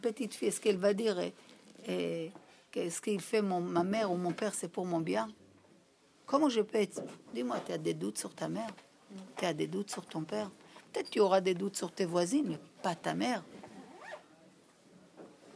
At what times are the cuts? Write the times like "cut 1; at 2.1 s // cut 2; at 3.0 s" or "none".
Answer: none

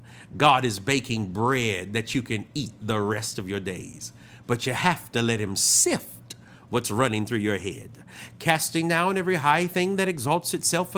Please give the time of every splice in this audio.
none

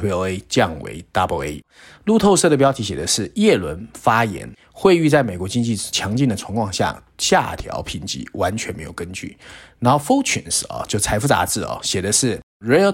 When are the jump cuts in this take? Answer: none

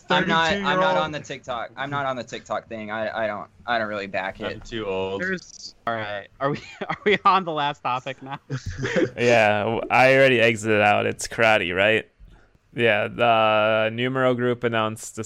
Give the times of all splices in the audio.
none

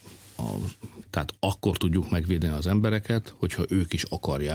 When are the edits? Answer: cut 1; at 1.0 s

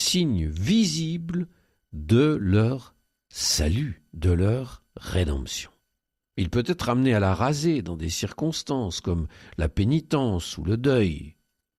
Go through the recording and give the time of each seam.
cut 1; at 6.2 s

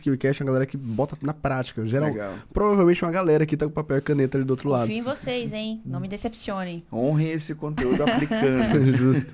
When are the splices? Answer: none

